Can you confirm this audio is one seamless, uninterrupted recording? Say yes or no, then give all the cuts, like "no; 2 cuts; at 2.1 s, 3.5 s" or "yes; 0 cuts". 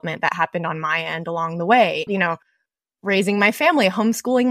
no; 1 cut; at 2.1 s